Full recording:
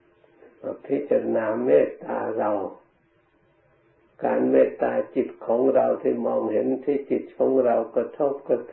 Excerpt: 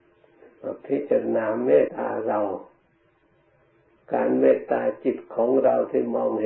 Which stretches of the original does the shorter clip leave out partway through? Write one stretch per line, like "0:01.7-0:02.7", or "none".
0:01.9-0:02.0